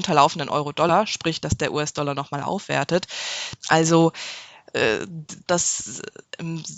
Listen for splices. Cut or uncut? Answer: cut